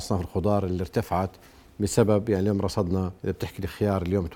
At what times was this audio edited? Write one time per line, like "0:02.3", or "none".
0:03.2

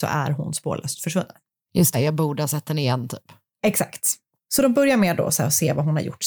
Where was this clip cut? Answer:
0:01.9
0:04.4

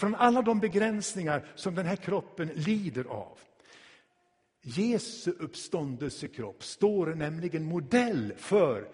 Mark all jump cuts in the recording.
none

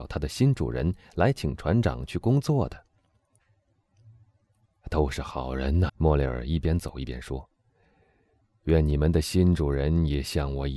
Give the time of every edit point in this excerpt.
0:05.9

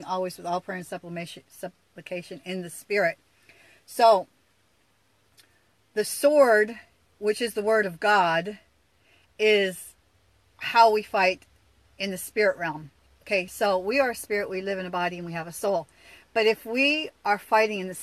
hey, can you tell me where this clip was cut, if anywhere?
none

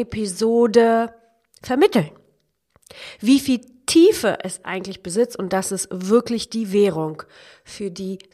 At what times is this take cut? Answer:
none

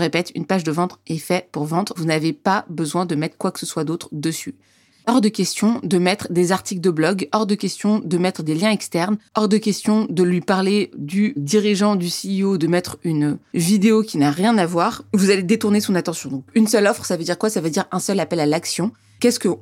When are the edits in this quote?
0:02.0
0:04.9

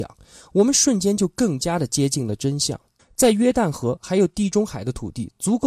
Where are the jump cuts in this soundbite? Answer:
0:03.0

